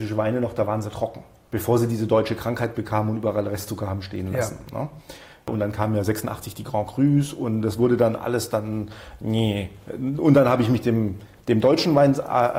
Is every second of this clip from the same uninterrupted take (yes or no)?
yes